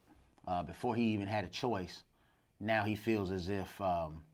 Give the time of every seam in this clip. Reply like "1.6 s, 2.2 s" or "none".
none